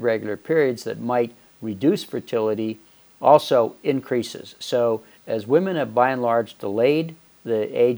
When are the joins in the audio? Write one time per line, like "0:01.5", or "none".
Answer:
none